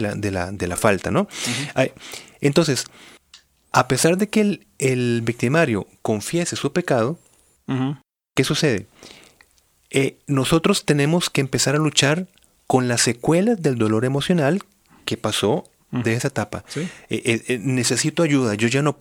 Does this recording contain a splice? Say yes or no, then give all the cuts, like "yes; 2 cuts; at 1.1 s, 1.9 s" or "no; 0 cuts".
yes; 1 cut; at 16.0 s